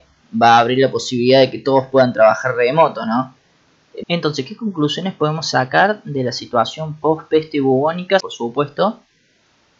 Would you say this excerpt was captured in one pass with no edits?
no; 2 cuts; at 4.0 s, 8.2 s

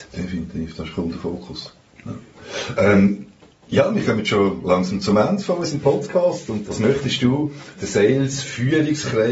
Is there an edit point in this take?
yes; 2 cuts; at 6.7 s, 7.7 s

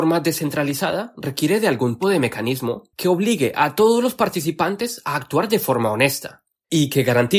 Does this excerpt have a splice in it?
yes; 1 cut; at 2.0 s

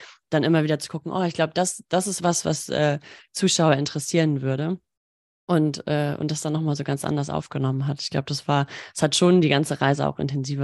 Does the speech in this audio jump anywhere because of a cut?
no; 0 cuts

